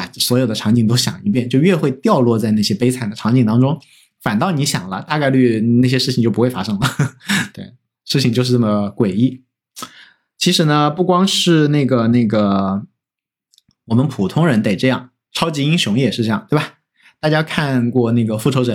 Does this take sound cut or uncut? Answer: uncut